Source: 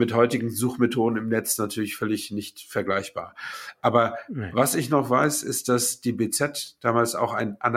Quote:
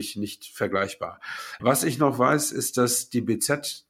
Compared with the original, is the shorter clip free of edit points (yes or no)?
no